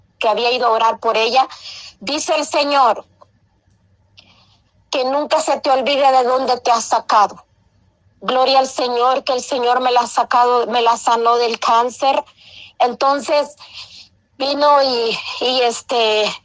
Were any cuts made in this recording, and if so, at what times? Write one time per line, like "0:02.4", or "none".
0:01.9
0:08.1
0:12.7